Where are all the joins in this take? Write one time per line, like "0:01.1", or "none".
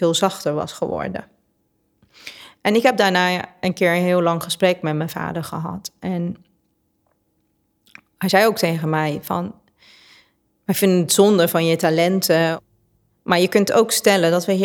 none